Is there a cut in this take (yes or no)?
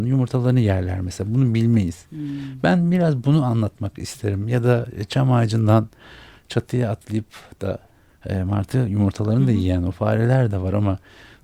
no